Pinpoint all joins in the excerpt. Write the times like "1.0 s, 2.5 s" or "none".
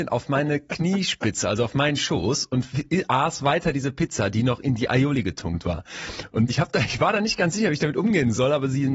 6.5 s